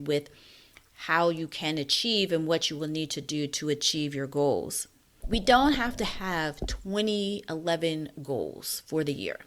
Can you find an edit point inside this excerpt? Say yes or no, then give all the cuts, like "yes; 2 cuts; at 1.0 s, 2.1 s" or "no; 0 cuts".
yes; 1 cut; at 5.2 s